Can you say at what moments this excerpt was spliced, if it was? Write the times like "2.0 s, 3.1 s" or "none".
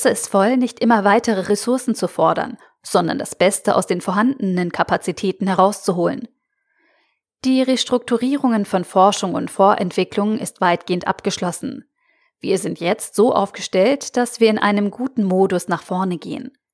none